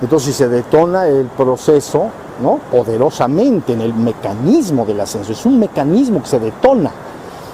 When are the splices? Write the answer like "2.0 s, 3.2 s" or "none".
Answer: 2.4 s